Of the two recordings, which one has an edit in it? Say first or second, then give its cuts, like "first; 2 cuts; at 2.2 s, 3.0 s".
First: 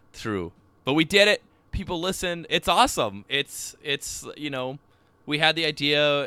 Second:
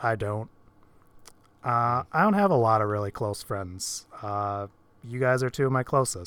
first; 1 cut; at 2.5 s